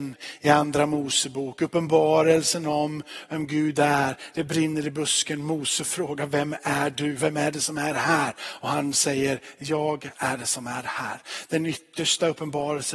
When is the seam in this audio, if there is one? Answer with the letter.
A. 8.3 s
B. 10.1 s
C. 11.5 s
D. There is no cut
B